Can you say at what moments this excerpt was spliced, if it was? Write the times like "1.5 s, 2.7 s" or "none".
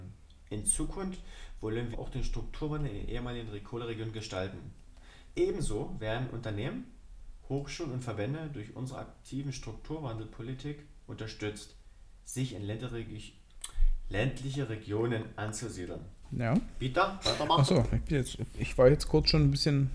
1.9 s, 5.3 s, 16.2 s